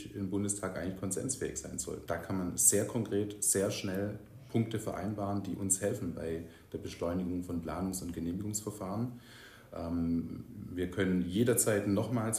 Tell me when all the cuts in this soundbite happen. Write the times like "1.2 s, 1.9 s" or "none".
2.1 s